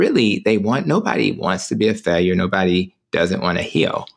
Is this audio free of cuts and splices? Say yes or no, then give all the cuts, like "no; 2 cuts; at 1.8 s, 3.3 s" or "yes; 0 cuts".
yes; 0 cuts